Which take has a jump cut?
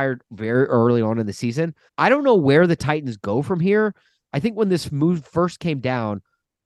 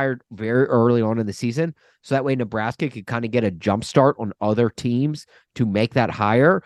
first; 1 cut; at 1.9 s

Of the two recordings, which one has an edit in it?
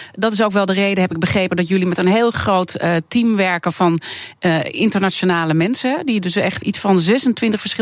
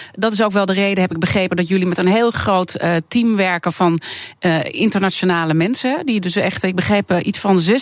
first; 1 cut; at 6.6 s

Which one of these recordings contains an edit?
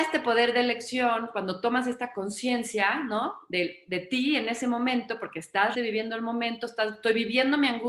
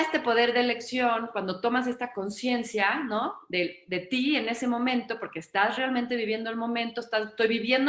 first; 1 cut; at 5.7 s

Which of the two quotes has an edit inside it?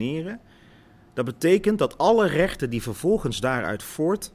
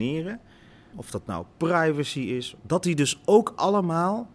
second; 2 cuts; at 0.9 s, 2.6 s

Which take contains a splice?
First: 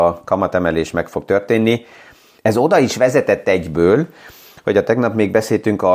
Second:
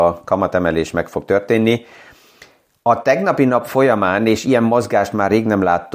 first; 1 cut; at 2.4 s

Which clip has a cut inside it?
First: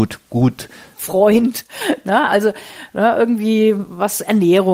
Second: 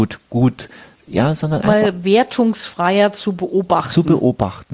first; 1 cut; at 1.0 s

